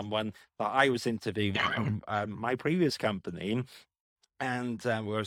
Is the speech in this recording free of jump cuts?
yes; 0 cuts

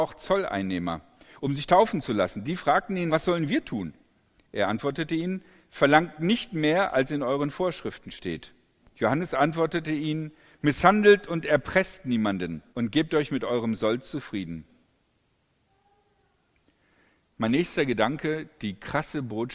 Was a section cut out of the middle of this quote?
yes; 3 cuts; at 3.1 s, 8.8 s, 12.7 s

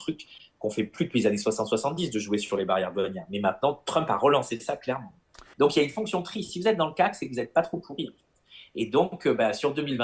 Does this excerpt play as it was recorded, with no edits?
no; 1 cut; at 5.5 s

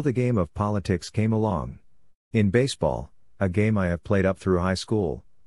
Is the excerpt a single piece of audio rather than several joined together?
no; 1 cut; at 2.3 s

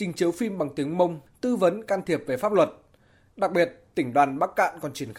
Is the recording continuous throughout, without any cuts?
no; 1 cut; at 1.3 s

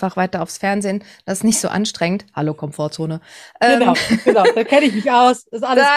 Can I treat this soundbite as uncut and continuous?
yes; 0 cuts

